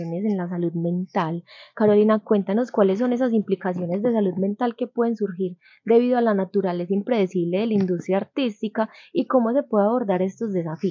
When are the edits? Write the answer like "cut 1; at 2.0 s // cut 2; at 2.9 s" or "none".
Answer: none